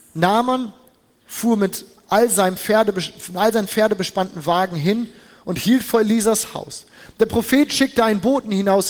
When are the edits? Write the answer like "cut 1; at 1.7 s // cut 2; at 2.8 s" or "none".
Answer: none